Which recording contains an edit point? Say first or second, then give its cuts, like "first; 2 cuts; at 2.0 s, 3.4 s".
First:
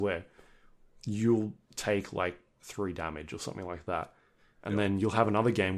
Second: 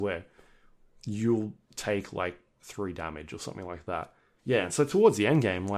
second; 1 cut; at 4.4 s